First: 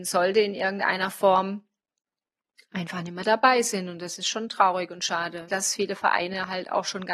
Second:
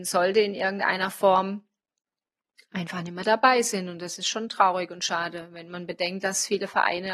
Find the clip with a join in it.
first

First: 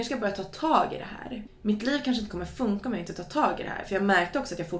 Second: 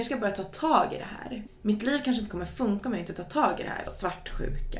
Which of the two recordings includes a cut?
second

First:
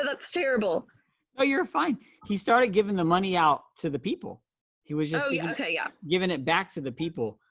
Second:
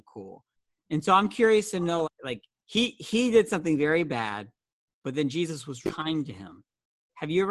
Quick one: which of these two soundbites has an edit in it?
second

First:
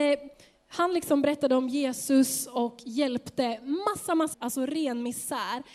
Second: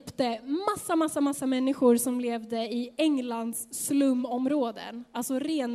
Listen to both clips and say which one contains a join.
first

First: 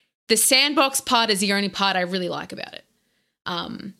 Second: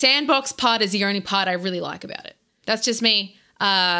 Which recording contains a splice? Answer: second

